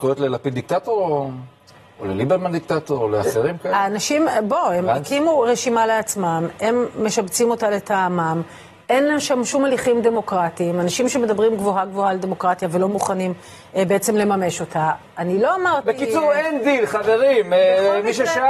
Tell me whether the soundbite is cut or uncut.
uncut